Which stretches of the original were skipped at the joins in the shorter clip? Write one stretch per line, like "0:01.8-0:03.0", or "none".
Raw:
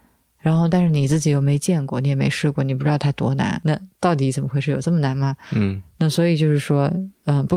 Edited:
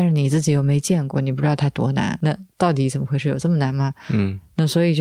0:01.9-0:02.6